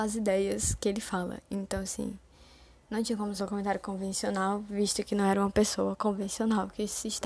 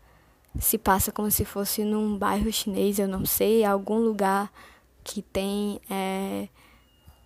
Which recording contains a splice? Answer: first; 1 cut; at 3.4 s

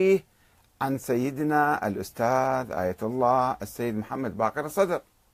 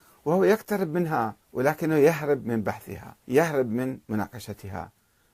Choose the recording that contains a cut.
second; 2 cuts; at 1.4 s, 3.2 s

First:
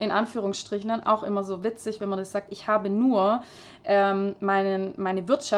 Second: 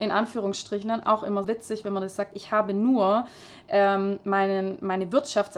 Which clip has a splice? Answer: second; 1 cut; at 1.4 s

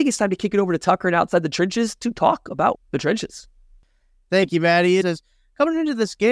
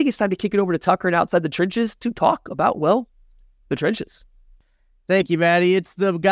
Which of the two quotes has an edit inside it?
first; 2 cuts; at 2.7 s, 5.0 s

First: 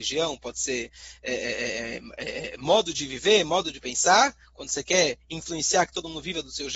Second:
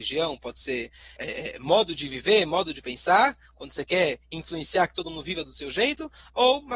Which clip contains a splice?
second; 1 cut; at 1.2 s

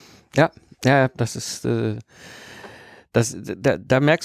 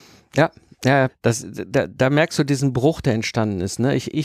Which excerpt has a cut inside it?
second; 1 cut; at 1.1 s

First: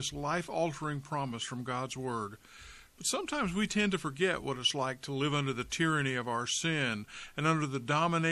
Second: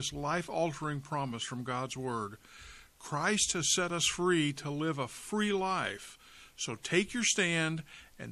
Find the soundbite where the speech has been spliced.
first; 1 cut; at 2.9 s

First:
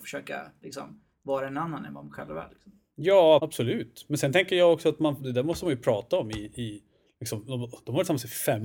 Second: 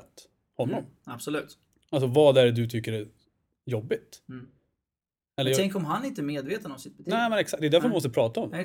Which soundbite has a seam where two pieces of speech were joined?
first; 1 cut; at 3.4 s

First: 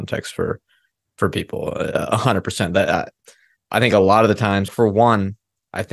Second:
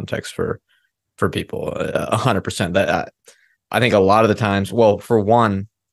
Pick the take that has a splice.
first; 1 cut; at 4.7 s

